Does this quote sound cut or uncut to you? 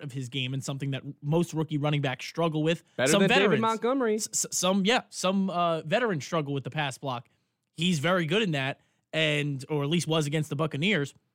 uncut